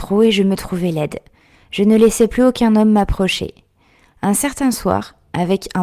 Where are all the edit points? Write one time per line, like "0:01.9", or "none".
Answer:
none